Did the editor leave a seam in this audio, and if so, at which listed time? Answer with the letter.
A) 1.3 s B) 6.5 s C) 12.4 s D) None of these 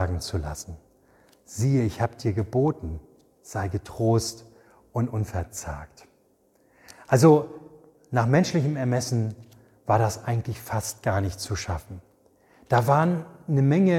D